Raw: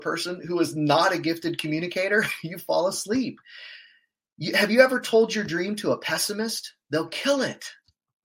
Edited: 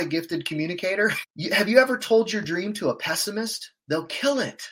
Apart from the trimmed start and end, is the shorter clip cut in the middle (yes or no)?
yes